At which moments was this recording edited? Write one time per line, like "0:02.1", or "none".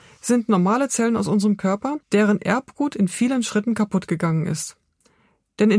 0:02.0